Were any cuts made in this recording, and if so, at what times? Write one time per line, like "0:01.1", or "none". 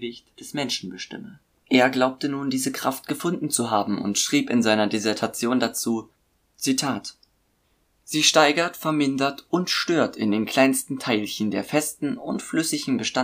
none